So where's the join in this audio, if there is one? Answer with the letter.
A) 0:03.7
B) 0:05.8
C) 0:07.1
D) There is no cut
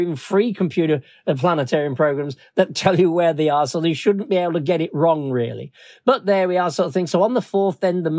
D